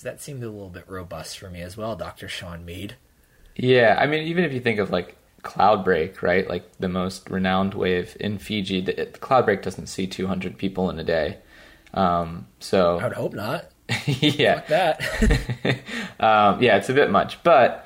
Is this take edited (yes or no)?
no